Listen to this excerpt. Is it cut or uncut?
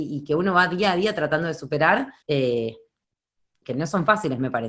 cut